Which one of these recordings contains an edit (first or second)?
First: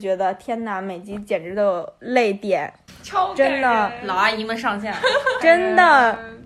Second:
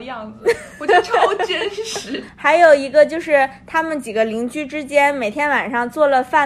first